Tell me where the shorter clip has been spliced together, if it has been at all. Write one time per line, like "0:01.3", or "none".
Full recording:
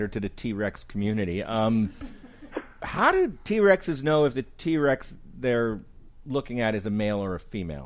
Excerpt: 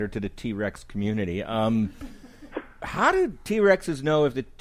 none